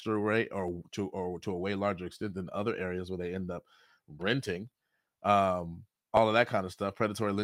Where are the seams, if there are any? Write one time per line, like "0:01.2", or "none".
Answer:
0:04.2